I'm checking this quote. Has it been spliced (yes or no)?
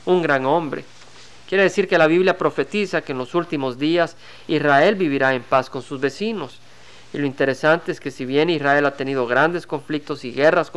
yes